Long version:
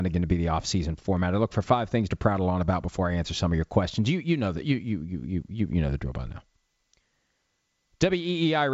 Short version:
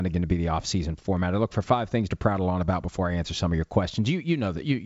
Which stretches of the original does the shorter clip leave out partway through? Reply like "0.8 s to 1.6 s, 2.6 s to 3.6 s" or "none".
none

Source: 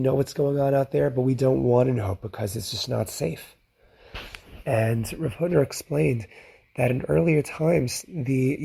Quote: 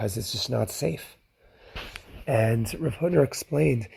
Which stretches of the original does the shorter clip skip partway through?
none

